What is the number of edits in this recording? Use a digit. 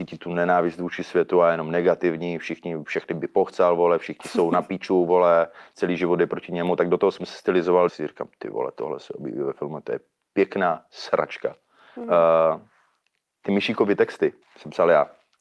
3